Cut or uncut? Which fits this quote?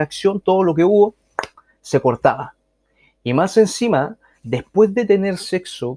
uncut